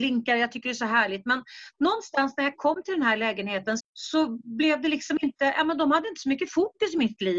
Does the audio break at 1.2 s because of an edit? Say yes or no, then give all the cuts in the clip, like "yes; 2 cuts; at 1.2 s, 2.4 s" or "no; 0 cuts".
no; 1 cut; at 3.8 s